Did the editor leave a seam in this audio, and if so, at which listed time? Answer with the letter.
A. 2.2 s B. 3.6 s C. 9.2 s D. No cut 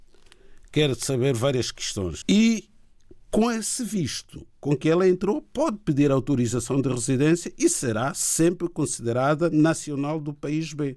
A